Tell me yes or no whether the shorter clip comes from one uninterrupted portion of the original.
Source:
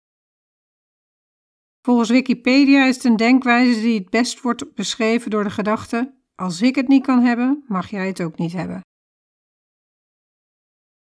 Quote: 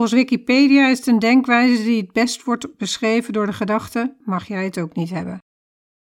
no